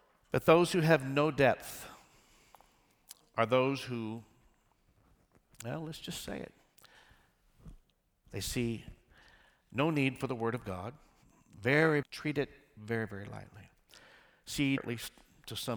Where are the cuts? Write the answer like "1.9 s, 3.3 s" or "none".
12.0 s, 14.8 s